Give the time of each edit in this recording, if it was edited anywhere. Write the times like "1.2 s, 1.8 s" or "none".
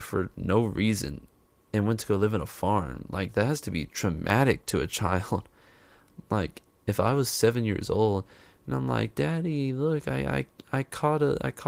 none

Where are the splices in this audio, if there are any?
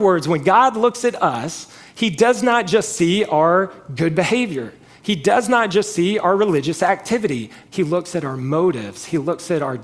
7.7 s

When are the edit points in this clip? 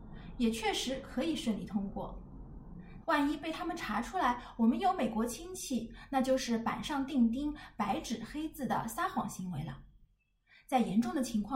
3.0 s

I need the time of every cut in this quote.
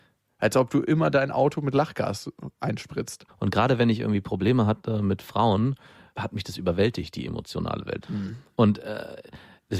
3.3 s, 8.0 s

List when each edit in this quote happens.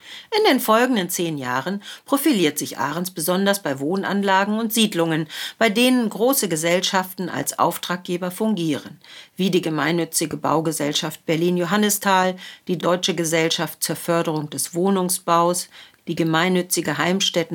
16.0 s

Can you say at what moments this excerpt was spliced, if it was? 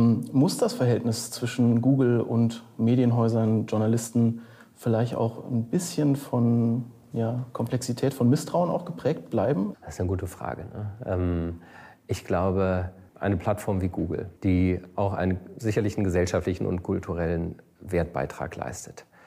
9.7 s, 13.1 s, 14.4 s

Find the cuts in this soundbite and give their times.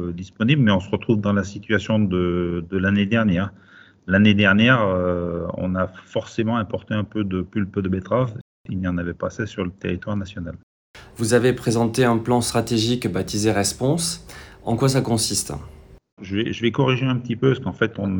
11.1 s, 16.2 s

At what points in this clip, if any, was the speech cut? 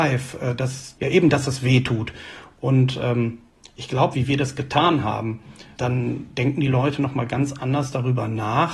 4.1 s, 5.8 s

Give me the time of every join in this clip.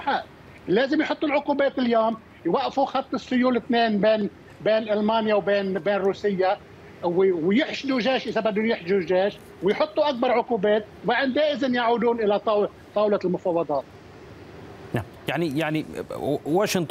none

